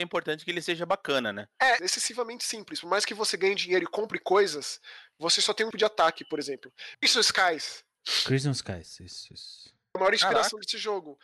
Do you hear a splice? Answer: yes; 3 cuts; at 1.8 s, 5.7 s, 6.9 s

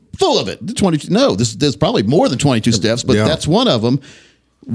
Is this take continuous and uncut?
yes; 0 cuts

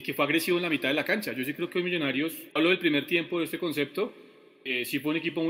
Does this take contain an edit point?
yes; 1 cut; at 2.5 s

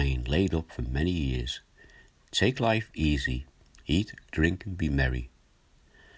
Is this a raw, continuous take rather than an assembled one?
yes; 0 cuts

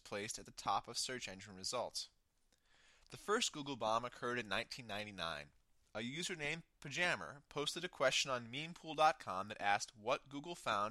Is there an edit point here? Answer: no; 0 cuts

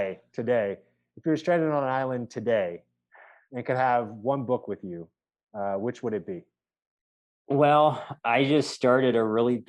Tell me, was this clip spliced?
no; 0 cuts

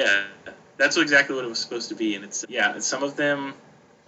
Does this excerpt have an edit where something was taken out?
yes; 1 cut; at 2.4 s

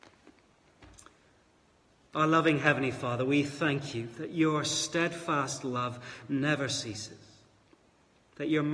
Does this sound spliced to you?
no; 0 cuts

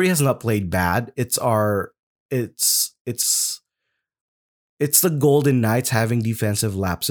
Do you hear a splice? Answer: no; 0 cuts

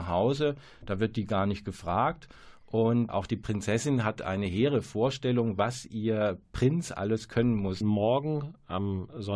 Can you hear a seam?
yes; 2 cuts; at 3.1 s, 7.8 s

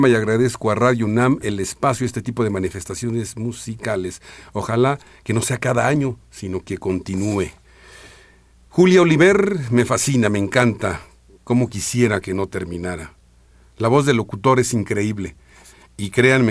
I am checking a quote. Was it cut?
no; 0 cuts

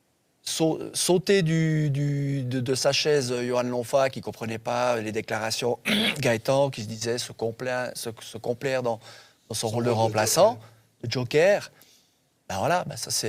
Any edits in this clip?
no; 0 cuts

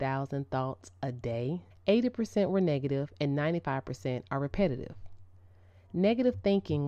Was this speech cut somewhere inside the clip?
yes; 1 cut; at 1.7 s

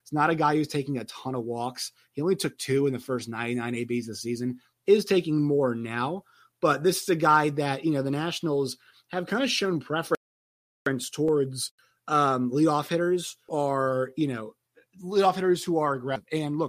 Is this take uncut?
yes; 0 cuts

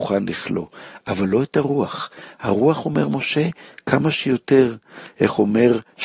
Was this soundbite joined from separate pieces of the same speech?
no; 0 cuts

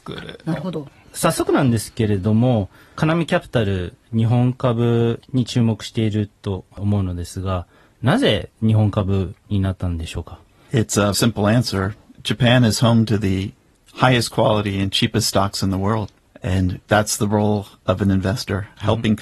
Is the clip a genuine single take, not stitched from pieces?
no; 2 cuts; at 11.1 s, 16.3 s

